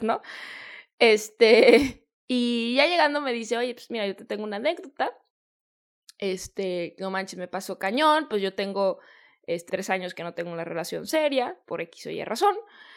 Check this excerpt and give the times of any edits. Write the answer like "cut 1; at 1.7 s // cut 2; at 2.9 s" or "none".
cut 1; at 9.7 s // cut 2; at 11.6 s